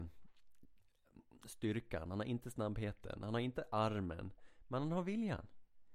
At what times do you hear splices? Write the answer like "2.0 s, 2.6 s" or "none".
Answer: none